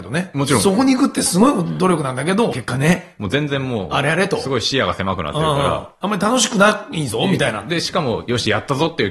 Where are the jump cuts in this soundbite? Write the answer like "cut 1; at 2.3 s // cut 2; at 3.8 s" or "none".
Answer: cut 1; at 2.5 s